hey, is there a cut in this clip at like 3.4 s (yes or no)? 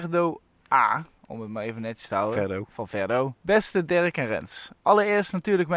yes